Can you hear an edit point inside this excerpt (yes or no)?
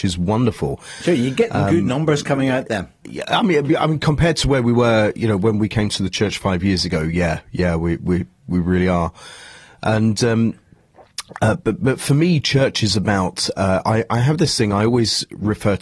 no